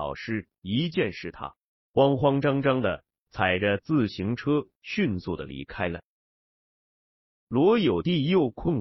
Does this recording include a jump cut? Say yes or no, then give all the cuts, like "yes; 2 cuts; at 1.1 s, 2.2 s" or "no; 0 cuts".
no; 0 cuts